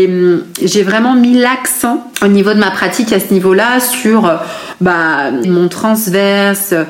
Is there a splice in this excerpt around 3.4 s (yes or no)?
no